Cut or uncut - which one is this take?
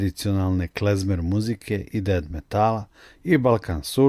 uncut